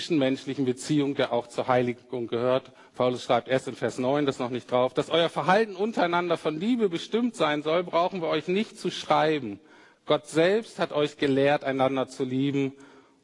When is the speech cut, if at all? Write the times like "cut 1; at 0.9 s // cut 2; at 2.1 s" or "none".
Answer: cut 1; at 2.9 s